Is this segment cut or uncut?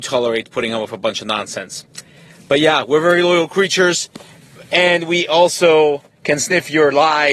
uncut